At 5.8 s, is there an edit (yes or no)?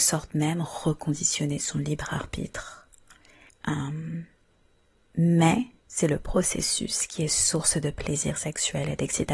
yes